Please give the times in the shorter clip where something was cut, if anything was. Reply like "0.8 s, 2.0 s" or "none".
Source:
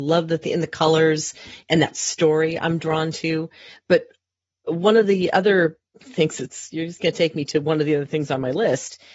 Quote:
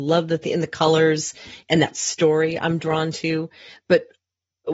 none